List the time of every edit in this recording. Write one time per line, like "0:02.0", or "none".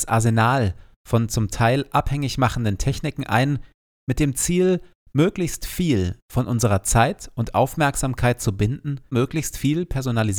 0:09.1

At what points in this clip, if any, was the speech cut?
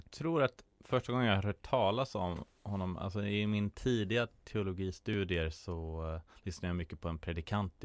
none

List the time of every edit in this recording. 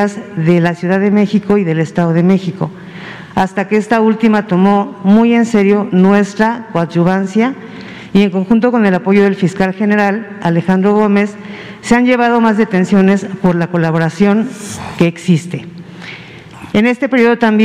0:16.7

